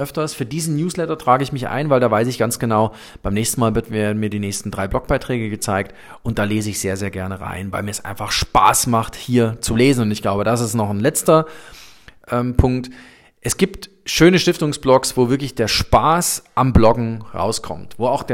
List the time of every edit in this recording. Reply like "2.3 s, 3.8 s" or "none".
none